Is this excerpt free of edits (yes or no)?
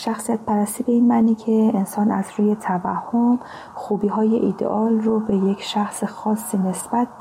yes